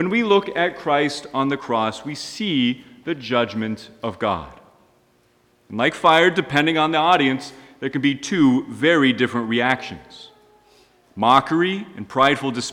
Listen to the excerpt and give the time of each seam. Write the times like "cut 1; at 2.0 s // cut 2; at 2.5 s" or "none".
none